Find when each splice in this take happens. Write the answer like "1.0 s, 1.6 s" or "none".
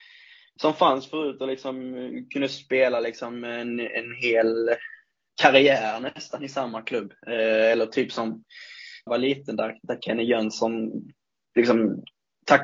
9.1 s